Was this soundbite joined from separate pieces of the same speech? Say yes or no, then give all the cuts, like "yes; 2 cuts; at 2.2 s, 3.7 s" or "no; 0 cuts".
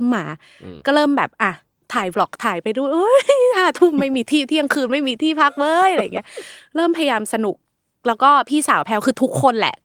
no; 0 cuts